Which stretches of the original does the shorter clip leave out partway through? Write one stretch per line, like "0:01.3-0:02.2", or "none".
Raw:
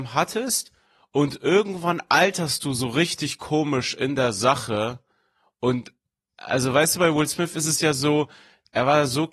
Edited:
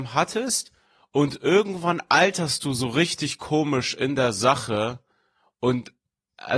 none

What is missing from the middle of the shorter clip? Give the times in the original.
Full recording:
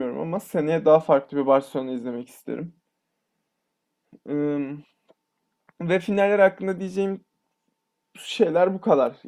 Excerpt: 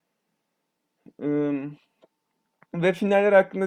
none

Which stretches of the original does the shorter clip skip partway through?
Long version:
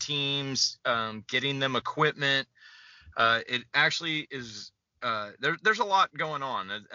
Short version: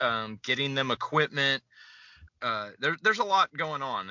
0:03.1-0:04.9

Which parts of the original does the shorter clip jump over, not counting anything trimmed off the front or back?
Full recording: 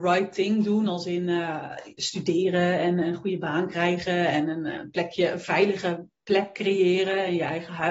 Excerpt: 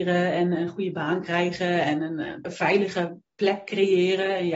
0:04.9-0:05.3

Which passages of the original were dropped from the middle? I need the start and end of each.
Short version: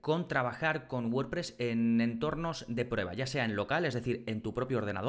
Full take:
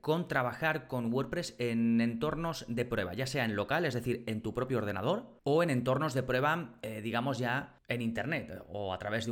none

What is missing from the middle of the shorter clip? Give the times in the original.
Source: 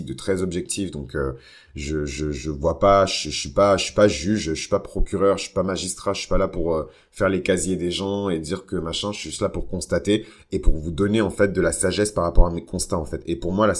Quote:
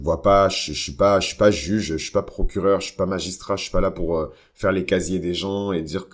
none

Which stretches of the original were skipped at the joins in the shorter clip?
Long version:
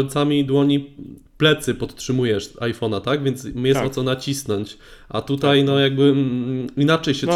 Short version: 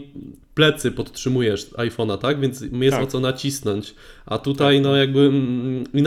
none

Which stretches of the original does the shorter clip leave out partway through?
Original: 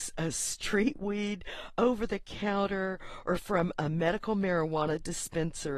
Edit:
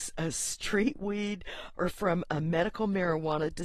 0:01.7-0:03.2

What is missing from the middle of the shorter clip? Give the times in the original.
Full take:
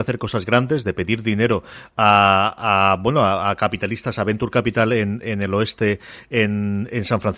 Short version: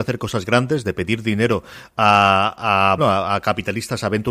0:03.0-0:03.1

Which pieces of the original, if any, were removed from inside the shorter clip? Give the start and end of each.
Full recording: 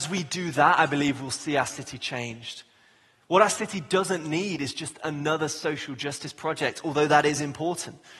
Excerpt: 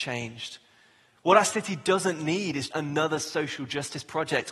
0:04.7-0:05.0

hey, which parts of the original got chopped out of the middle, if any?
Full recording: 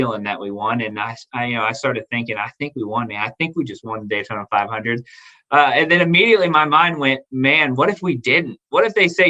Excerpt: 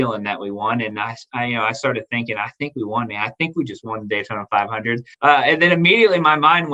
0:05.1-0:05.4

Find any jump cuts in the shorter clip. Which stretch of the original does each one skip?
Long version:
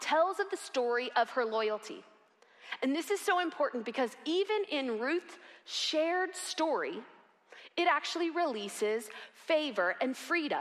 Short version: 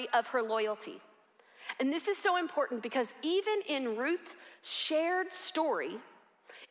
none

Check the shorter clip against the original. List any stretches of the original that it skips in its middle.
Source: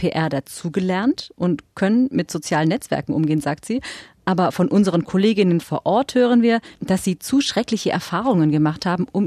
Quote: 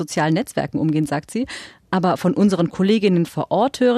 none

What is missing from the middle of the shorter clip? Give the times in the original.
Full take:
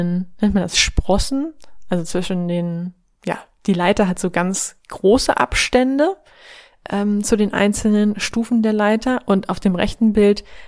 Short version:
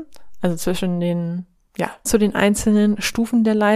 0:03.5-0:07.2

